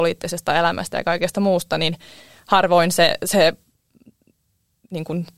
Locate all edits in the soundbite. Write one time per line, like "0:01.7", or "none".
none